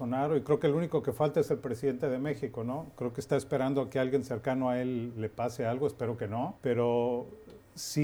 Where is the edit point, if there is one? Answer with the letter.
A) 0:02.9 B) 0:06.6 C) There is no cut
B